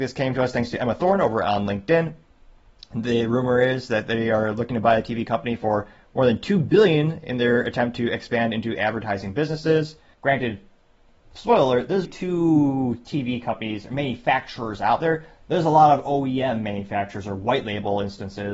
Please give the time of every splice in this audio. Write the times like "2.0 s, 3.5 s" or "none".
10.1 s, 12.0 s